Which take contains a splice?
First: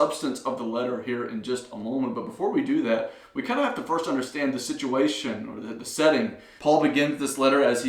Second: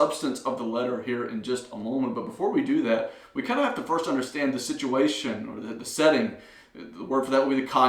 first; 1 cut; at 6.6 s

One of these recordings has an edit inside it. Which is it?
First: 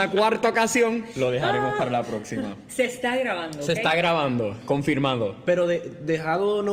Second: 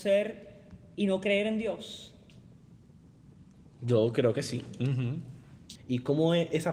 second; 1 cut; at 5.8 s

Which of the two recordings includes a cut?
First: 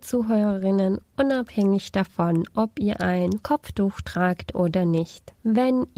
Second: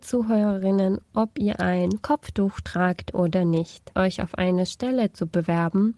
second; 2 cuts; at 1.1 s, 3.9 s

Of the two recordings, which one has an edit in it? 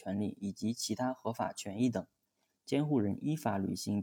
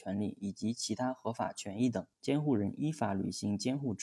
second; 1 cut; at 2.1 s

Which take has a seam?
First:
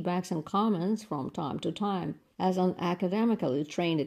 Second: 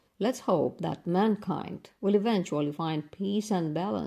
first; 1 cut; at 2.3 s

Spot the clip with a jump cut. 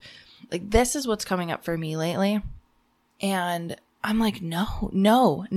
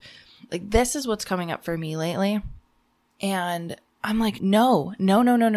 second; 1 cut; at 4.4 s

